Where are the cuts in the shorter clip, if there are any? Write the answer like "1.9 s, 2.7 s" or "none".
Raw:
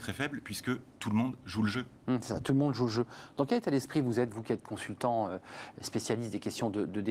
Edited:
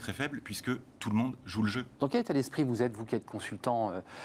2.0 s